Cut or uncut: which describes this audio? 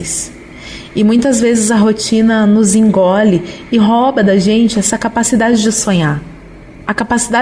uncut